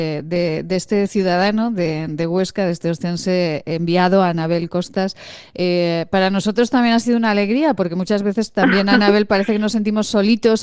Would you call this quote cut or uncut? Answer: uncut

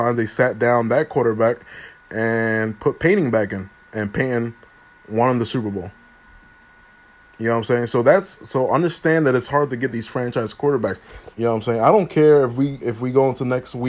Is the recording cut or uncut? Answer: cut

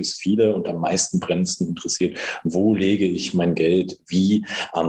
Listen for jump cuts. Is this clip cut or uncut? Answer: uncut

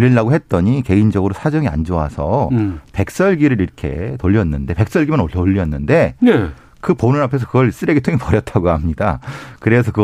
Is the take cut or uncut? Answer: uncut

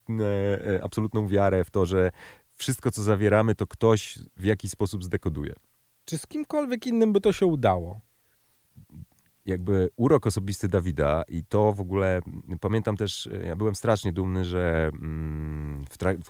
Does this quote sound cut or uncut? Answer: uncut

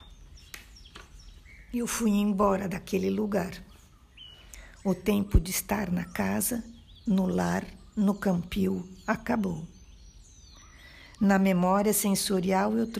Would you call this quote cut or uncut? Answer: uncut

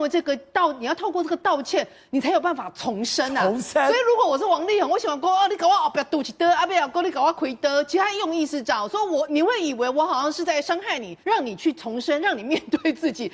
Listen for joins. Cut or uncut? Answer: cut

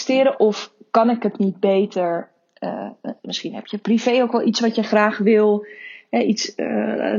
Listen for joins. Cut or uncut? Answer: uncut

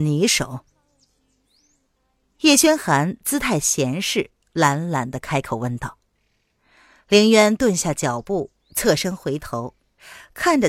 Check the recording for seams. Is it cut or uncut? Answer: uncut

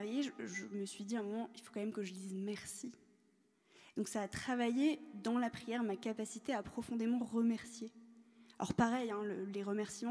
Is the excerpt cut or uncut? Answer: uncut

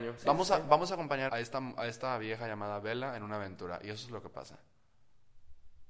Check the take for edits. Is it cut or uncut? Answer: cut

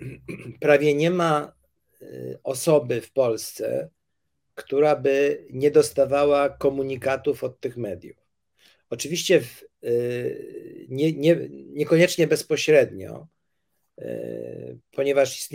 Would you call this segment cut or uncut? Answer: uncut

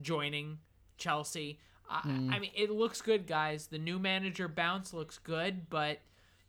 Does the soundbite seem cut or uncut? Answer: uncut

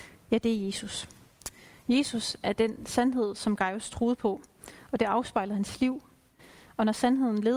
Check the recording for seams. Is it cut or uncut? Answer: uncut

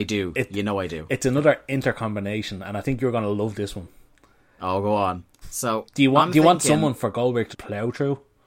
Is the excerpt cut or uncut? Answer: cut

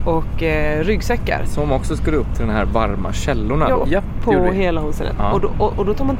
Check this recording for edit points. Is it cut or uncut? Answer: cut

